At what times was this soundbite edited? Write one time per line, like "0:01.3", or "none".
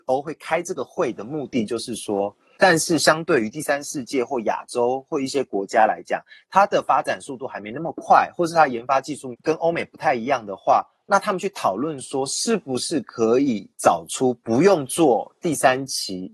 0:02.6